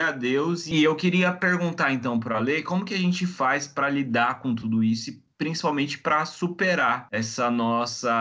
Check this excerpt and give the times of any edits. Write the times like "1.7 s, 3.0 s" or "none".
none